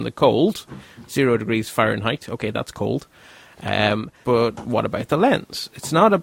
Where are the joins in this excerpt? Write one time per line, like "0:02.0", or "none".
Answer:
0:04.2